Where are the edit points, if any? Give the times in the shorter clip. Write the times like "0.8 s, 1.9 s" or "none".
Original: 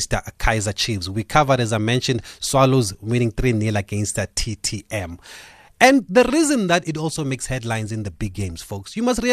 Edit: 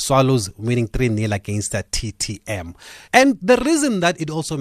3.0 s